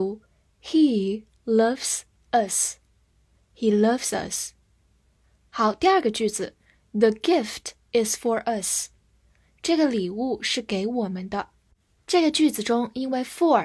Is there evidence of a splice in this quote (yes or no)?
no